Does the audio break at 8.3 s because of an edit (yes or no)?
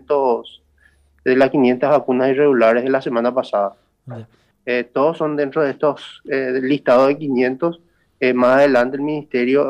no